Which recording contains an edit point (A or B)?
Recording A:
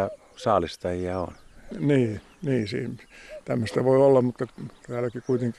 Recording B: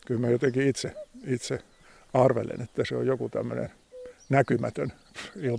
A